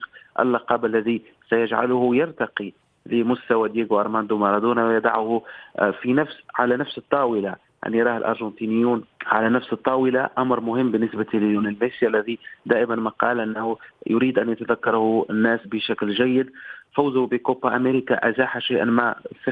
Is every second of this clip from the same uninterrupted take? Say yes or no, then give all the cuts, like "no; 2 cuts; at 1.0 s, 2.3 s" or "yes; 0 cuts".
no; 2 cuts; at 9.1 s, 15.6 s